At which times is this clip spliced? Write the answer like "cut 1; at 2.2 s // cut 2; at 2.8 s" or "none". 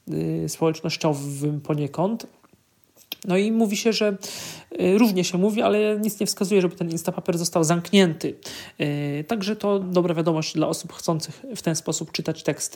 cut 1; at 9.8 s